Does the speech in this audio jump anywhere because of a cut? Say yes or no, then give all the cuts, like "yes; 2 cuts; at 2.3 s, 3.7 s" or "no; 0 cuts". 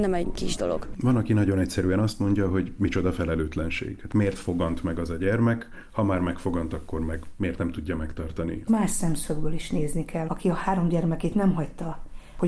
yes; 2 cuts; at 8.7 s, 10.3 s